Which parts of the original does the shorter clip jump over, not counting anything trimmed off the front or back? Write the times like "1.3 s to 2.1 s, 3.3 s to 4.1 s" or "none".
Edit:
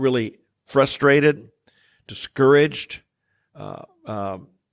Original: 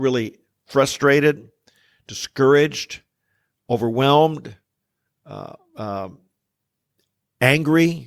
3.5 s to 5.2 s